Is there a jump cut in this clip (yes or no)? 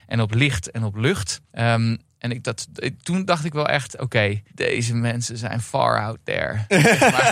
yes